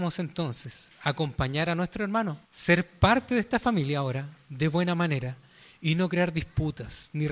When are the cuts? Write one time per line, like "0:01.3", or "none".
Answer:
0:02.4